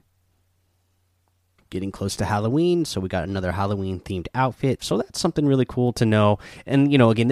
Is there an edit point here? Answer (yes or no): yes